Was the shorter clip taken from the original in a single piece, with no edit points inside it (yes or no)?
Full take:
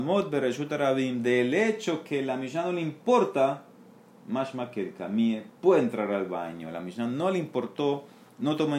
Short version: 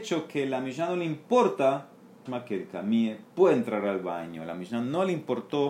no